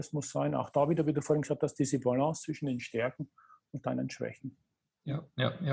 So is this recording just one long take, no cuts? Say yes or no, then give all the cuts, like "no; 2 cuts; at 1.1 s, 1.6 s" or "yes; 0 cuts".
yes; 0 cuts